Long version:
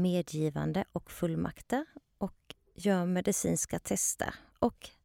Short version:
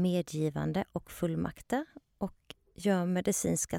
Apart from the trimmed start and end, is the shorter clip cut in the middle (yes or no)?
no